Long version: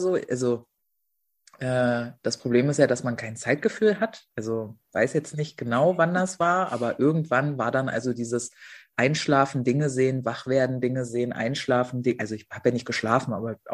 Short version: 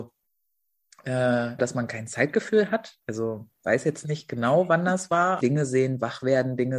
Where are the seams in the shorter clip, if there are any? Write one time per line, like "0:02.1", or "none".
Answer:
0:01.6
0:05.4